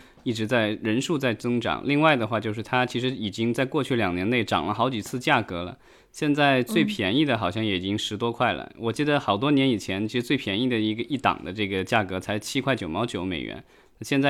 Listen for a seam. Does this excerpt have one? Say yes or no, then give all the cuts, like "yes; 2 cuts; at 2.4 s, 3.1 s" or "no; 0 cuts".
no; 0 cuts